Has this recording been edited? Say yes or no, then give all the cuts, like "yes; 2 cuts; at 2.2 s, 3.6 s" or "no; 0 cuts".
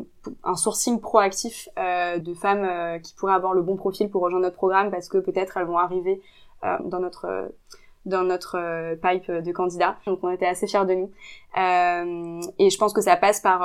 yes; 3 cuts; at 2.2 s, 6.8 s, 10.1 s